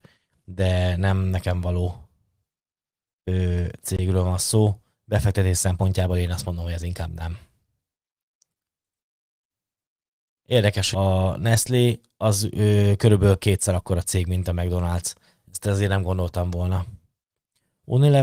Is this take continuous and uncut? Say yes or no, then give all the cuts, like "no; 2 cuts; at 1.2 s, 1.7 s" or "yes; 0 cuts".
no; 1 cut; at 10.9 s